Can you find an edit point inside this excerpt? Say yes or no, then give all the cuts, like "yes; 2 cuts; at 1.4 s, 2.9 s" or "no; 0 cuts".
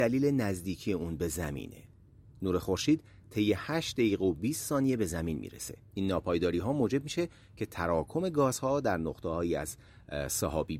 yes; 1 cut; at 5.9 s